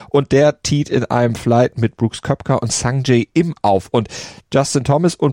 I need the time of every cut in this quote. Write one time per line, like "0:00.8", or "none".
none